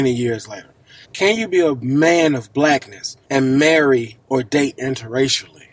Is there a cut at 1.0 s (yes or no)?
yes